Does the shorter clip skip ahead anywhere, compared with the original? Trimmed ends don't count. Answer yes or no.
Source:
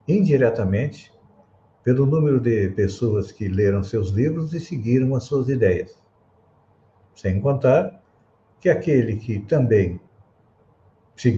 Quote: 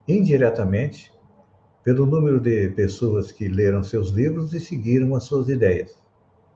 no